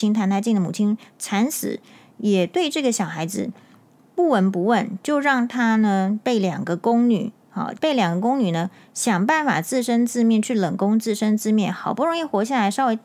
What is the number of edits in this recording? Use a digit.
1